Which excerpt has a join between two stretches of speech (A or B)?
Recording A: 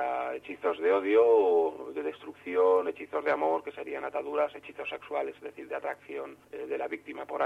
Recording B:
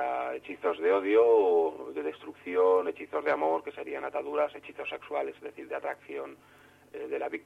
A